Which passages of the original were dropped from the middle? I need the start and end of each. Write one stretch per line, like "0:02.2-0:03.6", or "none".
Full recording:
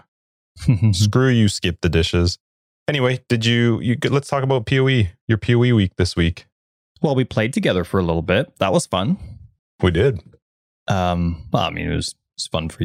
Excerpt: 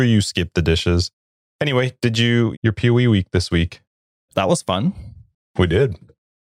0:03.8-0:05.2
0:06.9-0:08.5